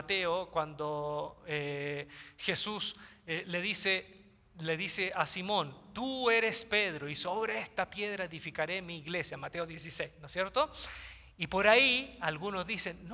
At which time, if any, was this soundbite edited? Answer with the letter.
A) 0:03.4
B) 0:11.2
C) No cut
C